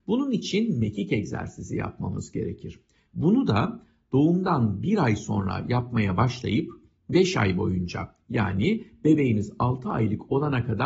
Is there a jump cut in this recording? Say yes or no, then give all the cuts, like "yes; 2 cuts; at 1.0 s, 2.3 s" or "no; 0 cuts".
yes; 1 cut; at 3.1 s